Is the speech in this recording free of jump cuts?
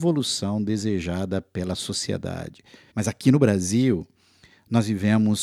no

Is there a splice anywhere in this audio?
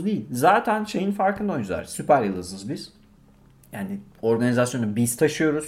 no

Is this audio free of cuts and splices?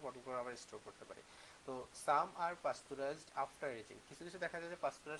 yes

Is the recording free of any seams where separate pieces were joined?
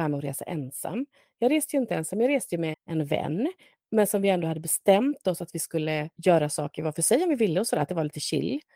no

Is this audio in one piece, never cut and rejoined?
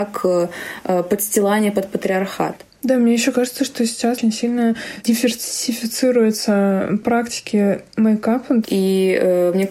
no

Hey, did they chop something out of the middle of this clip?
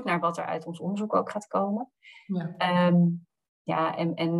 no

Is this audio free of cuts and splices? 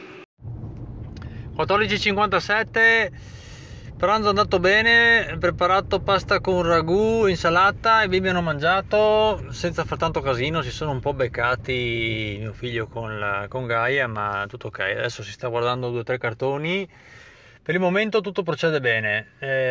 yes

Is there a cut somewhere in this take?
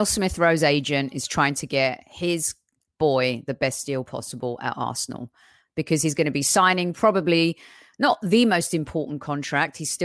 no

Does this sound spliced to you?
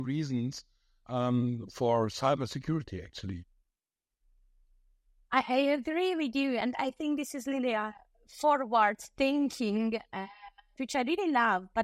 yes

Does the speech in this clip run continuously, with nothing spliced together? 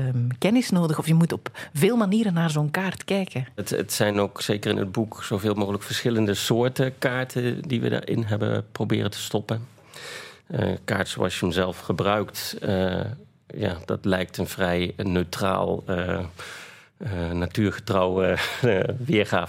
no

